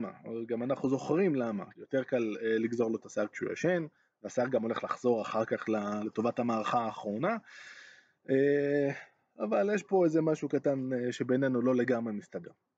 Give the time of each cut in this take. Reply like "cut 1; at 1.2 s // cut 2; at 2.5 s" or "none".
cut 1; at 1.7 s